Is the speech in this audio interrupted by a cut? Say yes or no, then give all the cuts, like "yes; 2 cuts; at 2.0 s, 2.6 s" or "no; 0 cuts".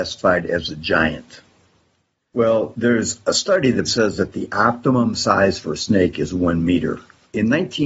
yes; 2 cuts; at 2.3 s, 3.9 s